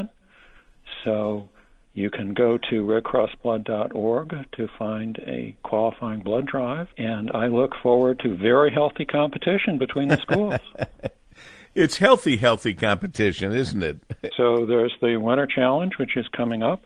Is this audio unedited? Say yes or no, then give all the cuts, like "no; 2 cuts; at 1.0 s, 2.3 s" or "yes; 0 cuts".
no; 2 cuts; at 6.9 s, 14.3 s